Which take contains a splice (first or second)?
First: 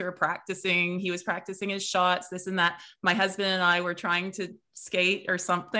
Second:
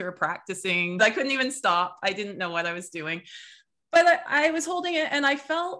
second